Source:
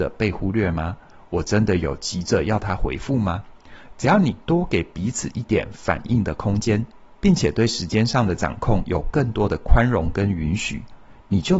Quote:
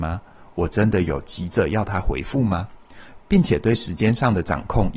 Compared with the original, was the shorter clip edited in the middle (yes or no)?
yes